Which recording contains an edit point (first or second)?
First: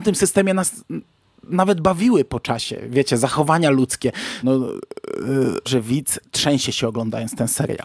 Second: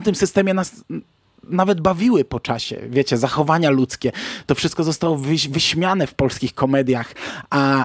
first